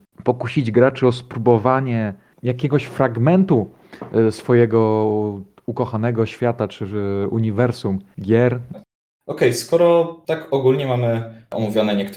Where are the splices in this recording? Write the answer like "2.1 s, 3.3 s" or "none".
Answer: 8.7 s